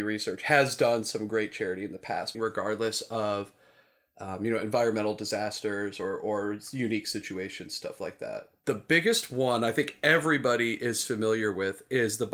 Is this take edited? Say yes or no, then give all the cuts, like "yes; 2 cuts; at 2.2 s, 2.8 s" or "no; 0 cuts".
yes; 1 cut; at 2.3 s